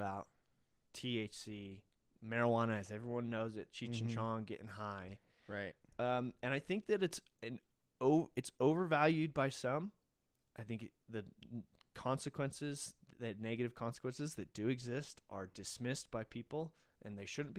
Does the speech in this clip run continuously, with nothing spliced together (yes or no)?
yes